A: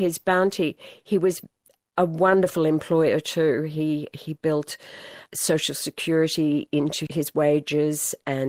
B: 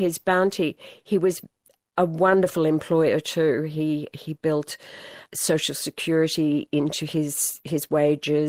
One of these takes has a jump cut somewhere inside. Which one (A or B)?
A